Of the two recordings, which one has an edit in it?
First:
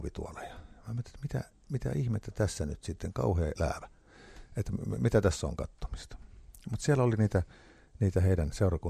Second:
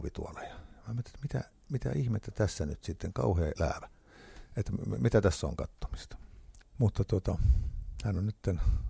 second; 1 cut; at 6.6 s

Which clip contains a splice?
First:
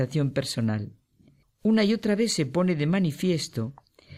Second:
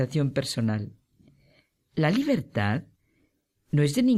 first; 1 cut; at 1.4 s

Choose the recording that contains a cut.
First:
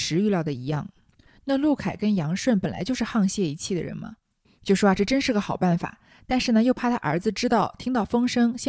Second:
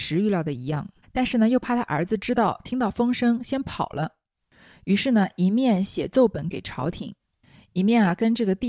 second; 1 cut; at 1.0 s

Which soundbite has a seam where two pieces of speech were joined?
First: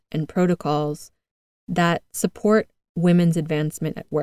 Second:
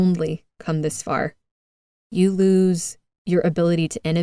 second; 1 cut; at 1.9 s

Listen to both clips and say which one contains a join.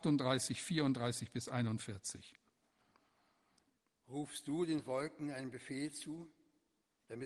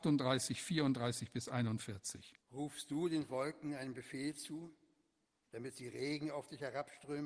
second; 1 cut; at 2.4 s

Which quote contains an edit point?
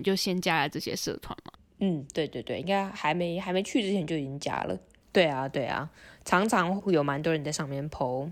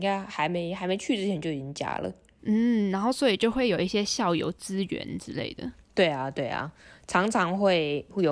first; 2 cuts; at 5.0 s, 6.8 s

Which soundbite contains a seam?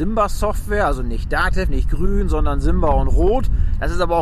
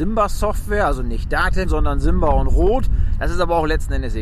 second; 1 cut; at 1.6 s

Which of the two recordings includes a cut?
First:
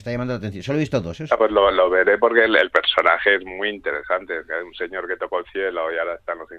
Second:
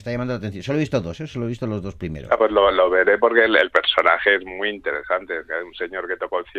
first; 1 cut; at 1.3 s

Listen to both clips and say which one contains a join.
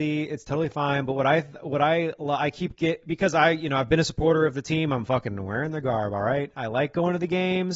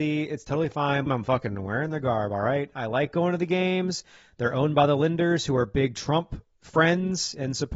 second; 1 cut; at 1.1 s

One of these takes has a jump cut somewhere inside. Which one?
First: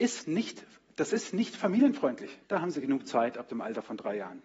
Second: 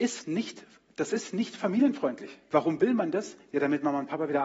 first; 1 cut; at 2.4 s

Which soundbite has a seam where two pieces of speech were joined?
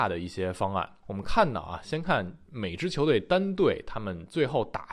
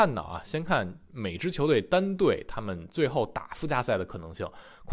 first; 1 cut; at 1.0 s

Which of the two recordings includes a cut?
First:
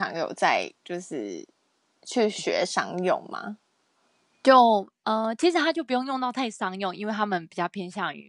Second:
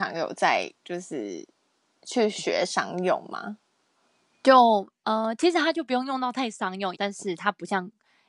second; 1 cut; at 6.9 s

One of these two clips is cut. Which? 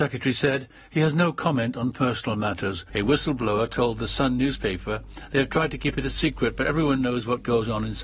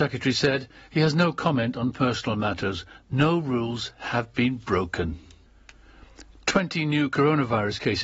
first; 1 cut; at 2.9 s

